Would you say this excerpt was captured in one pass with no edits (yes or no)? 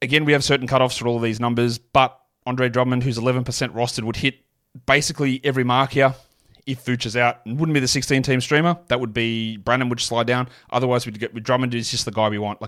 yes